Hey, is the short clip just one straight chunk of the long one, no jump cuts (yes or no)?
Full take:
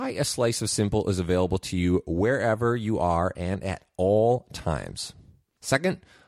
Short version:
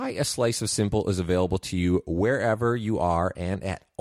yes